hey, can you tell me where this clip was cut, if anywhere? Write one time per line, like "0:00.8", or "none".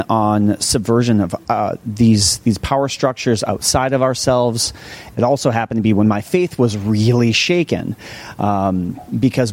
0:05.1